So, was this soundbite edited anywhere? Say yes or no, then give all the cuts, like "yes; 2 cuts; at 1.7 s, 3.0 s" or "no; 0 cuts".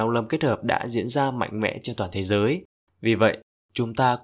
yes; 1 cut; at 2.9 s